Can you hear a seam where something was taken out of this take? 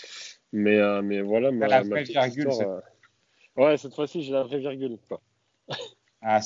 yes; 1 cut; at 5.1 s

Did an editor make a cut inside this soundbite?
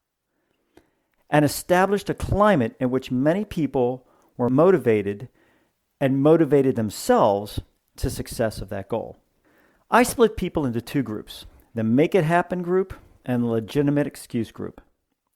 no; 0 cuts

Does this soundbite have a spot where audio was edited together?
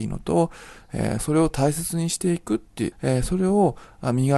yes; 2 cuts; at 1.2 s, 2.9 s

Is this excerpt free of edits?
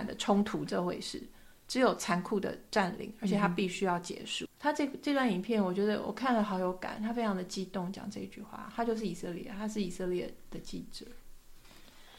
no; 1 cut; at 4.5 s

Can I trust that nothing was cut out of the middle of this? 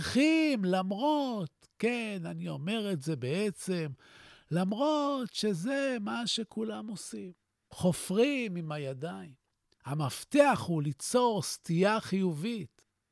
no; 1 cut; at 9.7 s

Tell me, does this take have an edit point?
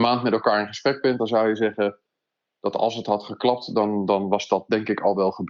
no; 0 cuts

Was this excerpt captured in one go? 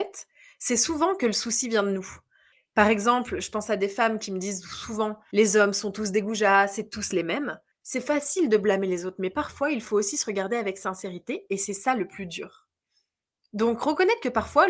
no; 1 cut; at 7.7 s

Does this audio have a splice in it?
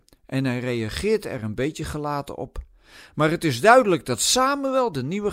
no; 0 cuts

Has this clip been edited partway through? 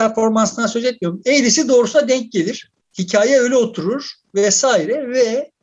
no; 0 cuts

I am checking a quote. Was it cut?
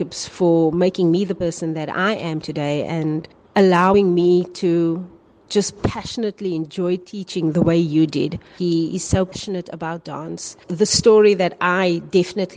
yes; 1 cut; at 8.6 s

